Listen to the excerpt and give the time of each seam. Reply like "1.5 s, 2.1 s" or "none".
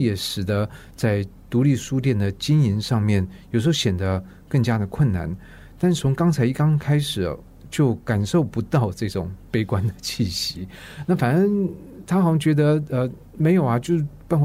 none